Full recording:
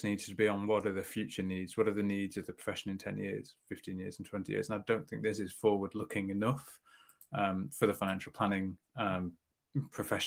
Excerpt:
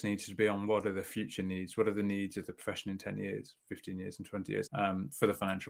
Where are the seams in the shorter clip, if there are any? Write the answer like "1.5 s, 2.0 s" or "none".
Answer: 4.7 s

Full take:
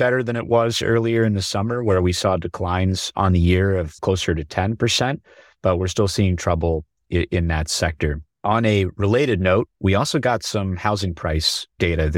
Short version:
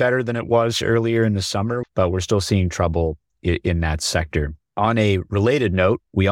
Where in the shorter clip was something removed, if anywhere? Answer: 1.8 s

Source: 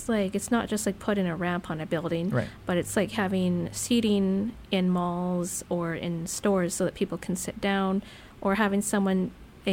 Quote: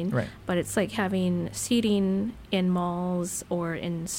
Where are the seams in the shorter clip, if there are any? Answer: none

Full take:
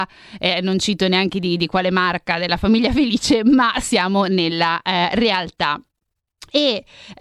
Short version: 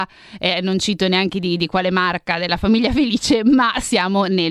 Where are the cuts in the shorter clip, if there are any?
none

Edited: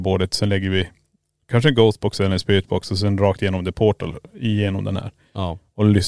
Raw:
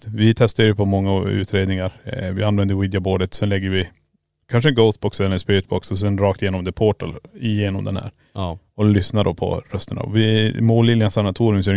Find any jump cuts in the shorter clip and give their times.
none

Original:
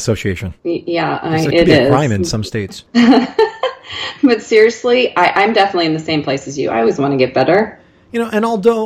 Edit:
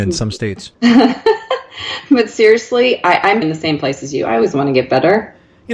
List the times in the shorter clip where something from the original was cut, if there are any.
3.4 s

